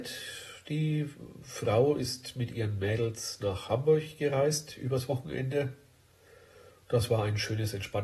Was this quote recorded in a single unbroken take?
yes; 0 cuts

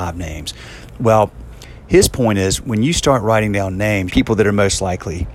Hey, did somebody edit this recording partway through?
yes; 1 cut; at 4.1 s

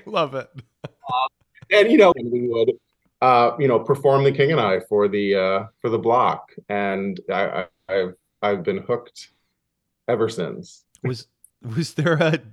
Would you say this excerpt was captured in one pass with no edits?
no; 1 cut; at 2.1 s

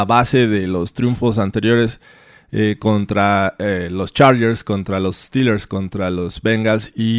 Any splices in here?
no; 0 cuts

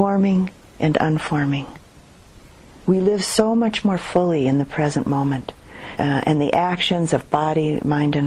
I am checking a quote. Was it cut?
yes; 2 cuts; at 2.8 s, 6.0 s

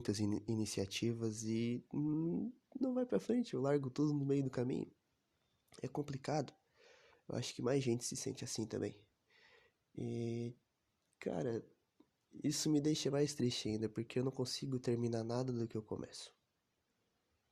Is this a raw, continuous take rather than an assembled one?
yes; 0 cuts

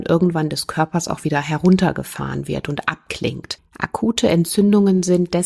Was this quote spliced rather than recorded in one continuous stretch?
no; 0 cuts

